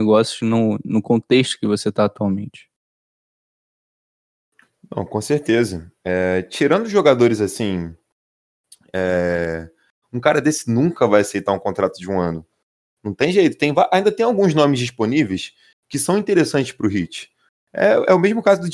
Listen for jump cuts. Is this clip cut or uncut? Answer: cut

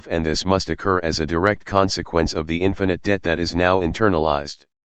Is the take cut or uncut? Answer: uncut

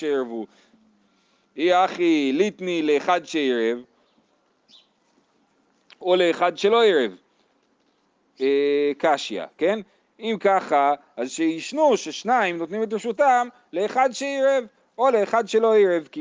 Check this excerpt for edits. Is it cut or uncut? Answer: uncut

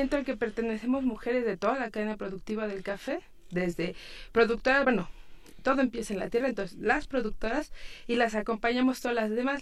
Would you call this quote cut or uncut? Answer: uncut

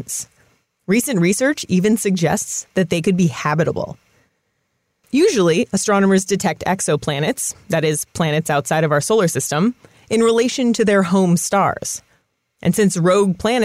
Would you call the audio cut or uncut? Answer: uncut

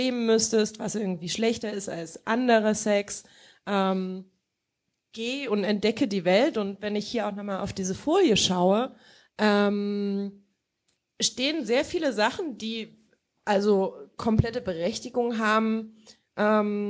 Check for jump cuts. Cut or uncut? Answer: uncut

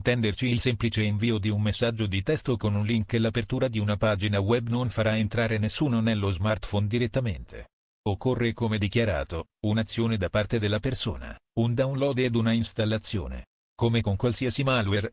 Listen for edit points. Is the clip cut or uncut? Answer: uncut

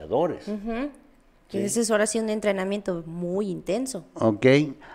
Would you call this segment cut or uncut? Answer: uncut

